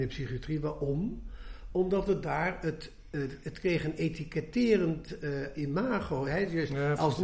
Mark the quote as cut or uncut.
uncut